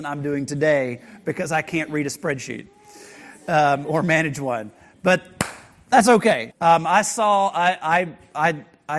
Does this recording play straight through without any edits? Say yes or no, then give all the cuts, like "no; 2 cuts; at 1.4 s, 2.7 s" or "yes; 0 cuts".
no; 1 cut; at 6.5 s